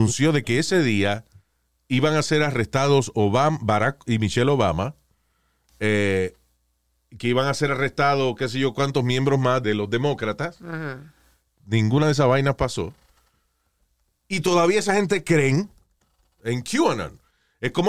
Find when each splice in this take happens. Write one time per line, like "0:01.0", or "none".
0:09.6
0:11.5